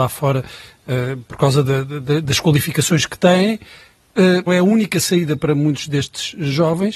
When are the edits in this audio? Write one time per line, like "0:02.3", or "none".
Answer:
0:04.5